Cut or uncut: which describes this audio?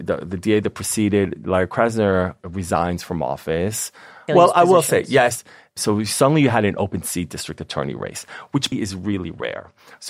cut